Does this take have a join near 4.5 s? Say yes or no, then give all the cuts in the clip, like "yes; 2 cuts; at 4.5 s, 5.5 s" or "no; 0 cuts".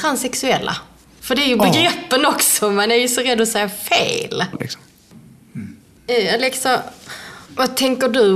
yes; 1 cut; at 4.5 s